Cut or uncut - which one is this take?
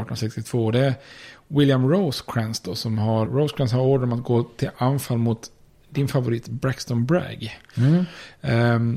cut